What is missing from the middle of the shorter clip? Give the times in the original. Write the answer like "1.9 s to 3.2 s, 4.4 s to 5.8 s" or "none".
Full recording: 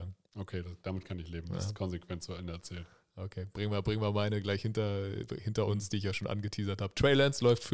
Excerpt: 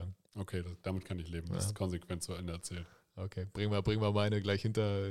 none